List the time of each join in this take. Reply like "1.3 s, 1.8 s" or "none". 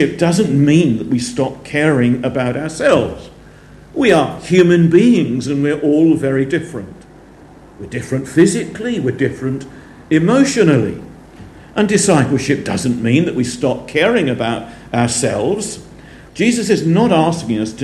16.3 s